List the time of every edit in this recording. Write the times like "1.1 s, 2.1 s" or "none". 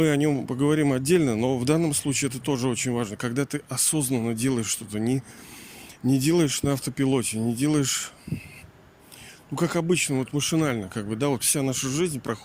none

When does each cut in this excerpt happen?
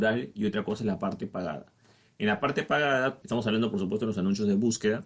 3.2 s

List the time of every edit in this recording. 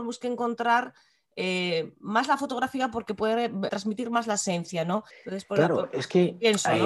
3.7 s, 5.1 s

